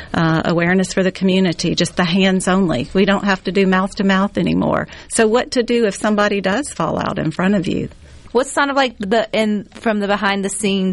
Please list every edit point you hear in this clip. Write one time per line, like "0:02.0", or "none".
0:08.3